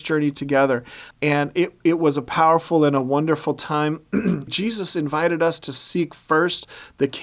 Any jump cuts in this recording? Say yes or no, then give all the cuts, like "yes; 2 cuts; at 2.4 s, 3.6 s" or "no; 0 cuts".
yes; 2 cuts; at 1.1 s, 4.5 s